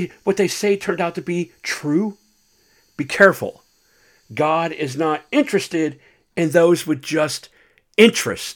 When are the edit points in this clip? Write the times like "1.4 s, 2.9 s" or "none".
none